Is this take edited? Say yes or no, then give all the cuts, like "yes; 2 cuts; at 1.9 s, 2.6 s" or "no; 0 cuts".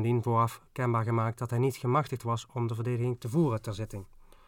no; 0 cuts